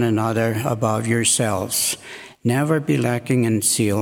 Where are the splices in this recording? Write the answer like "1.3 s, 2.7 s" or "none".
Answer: none